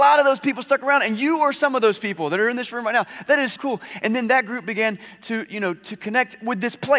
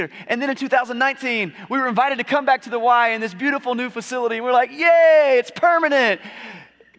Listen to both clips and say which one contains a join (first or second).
first